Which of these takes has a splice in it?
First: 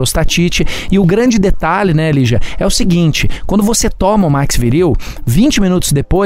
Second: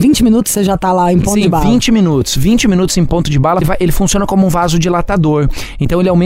second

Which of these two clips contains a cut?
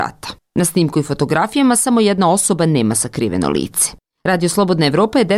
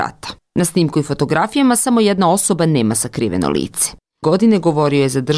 second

